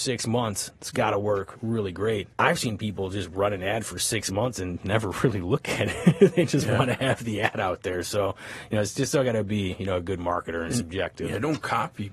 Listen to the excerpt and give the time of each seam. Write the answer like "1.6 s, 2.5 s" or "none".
none